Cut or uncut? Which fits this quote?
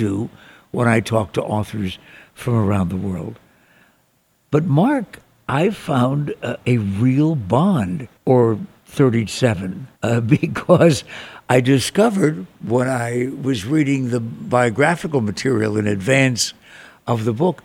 cut